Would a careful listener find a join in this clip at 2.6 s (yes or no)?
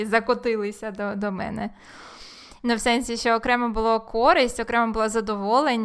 yes